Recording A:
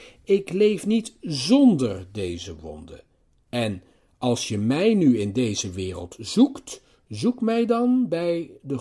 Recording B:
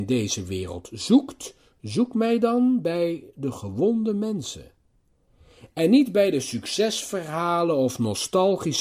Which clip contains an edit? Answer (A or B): A